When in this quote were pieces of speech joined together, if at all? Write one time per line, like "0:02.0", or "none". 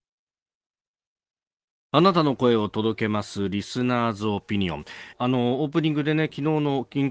0:05.1